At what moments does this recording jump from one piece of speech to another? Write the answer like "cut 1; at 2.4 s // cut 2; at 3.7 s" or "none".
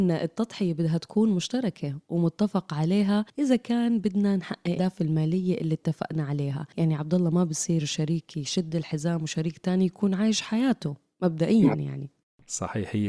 cut 1; at 4.8 s